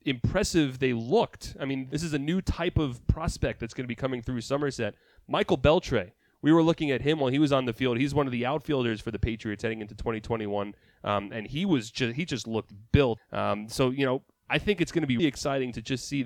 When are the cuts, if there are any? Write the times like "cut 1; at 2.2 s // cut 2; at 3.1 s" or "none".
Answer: cut 1; at 13.2 s // cut 2; at 15.2 s